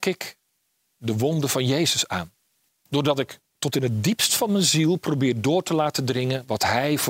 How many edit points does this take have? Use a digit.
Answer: 1